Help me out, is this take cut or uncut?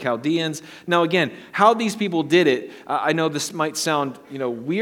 uncut